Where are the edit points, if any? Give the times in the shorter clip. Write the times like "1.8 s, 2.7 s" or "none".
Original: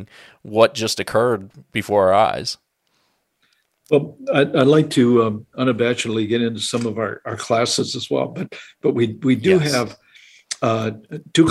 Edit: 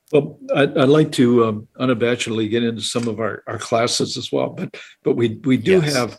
none